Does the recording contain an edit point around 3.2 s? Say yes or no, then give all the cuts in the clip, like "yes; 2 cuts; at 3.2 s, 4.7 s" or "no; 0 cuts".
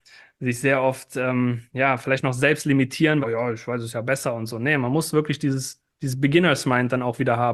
yes; 1 cut; at 3.2 s